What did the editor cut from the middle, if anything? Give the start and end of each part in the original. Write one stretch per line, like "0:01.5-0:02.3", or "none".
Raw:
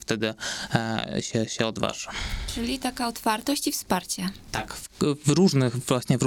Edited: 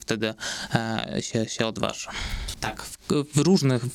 0:02.5-0:04.4